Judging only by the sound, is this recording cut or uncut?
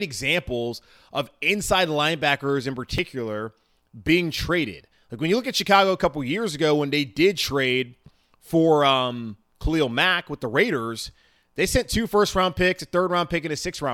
uncut